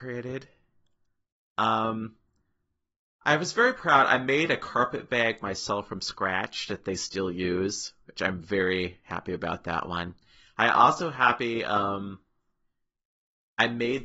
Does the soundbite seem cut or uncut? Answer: uncut